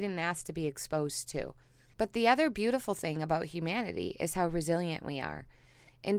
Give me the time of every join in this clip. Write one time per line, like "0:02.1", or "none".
0:01.9